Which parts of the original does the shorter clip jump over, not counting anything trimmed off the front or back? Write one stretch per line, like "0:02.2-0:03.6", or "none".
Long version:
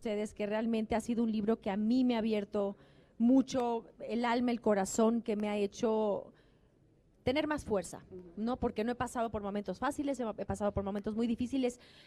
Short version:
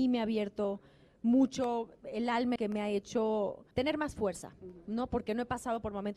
0:04.5-0:05.2
0:06.4-0:07.2